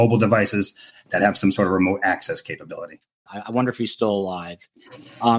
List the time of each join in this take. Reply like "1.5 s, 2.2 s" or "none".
3.3 s